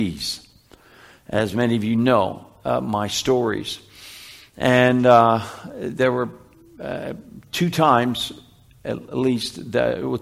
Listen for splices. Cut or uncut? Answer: uncut